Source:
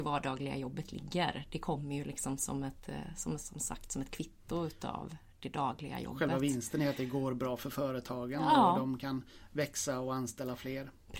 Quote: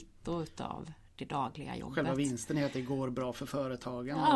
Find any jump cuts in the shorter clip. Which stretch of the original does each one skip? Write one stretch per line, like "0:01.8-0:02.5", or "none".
none